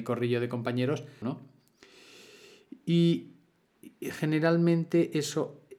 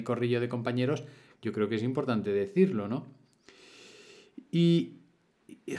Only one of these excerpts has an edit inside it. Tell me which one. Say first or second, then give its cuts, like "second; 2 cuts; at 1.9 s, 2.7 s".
first; 1 cut; at 1.2 s